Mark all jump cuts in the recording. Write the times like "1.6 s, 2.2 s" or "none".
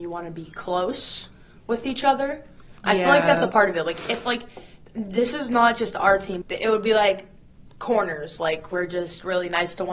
6.4 s, 8.4 s